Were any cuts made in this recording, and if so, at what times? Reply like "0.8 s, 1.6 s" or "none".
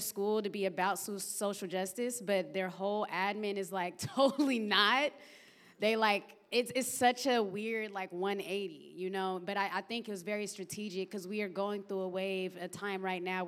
none